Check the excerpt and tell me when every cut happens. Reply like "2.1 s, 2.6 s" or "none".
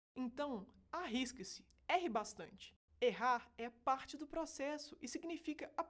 none